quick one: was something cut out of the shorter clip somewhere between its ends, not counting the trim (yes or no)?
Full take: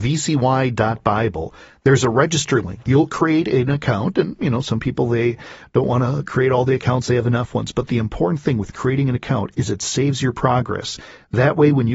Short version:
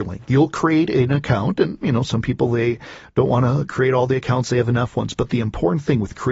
no